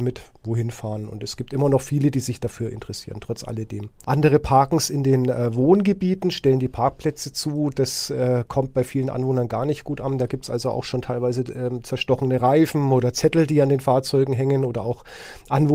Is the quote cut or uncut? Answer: cut